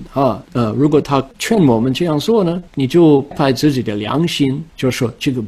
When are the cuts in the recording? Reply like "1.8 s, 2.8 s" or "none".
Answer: 3.3 s